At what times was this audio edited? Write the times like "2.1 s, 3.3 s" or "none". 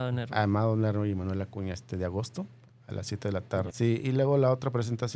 1.7 s, 3.7 s